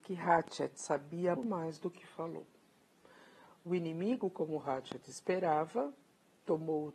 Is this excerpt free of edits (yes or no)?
no